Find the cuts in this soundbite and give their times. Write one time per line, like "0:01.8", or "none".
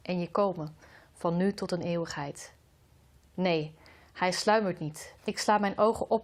0:03.2
0:05.2